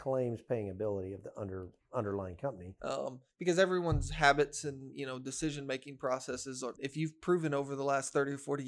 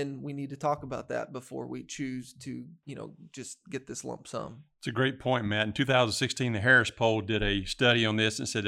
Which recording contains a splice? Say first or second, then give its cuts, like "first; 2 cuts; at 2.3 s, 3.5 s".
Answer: first; 2 cuts; at 2.8 s, 6.8 s